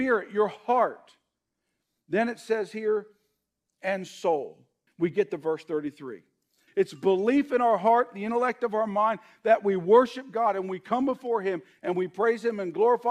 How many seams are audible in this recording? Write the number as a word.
two